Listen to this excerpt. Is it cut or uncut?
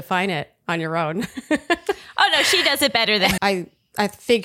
cut